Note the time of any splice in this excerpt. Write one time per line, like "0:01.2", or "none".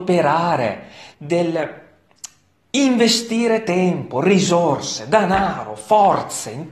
0:01.1

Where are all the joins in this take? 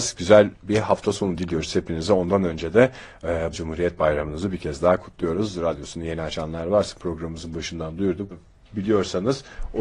0:03.5
0:08.3

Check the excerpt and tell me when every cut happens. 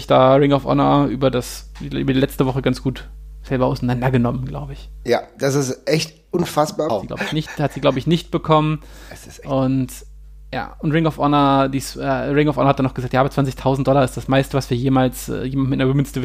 0:06.9

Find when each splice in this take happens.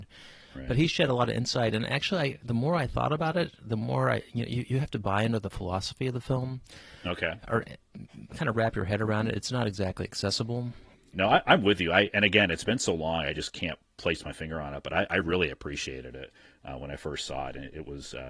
0:11.1

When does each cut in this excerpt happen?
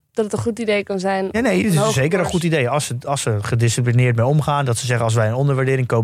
none

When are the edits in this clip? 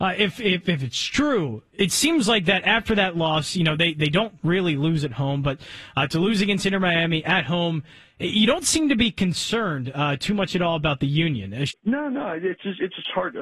0:11.7

